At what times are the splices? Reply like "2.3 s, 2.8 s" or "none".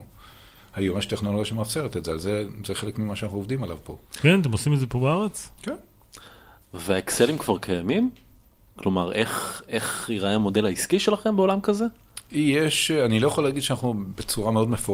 none